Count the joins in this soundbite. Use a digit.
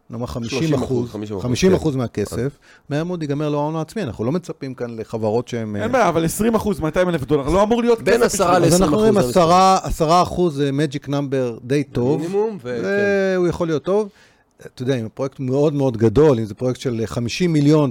0